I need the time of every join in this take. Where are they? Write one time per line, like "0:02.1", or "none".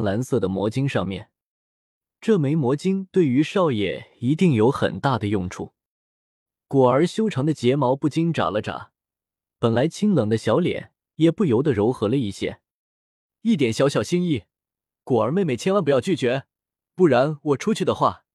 0:06.6
0:13.3